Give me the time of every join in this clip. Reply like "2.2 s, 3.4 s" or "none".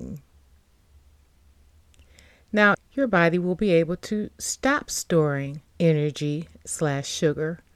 2.7 s, 5.7 s